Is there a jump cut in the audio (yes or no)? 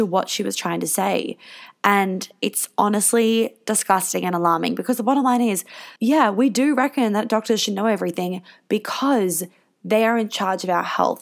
yes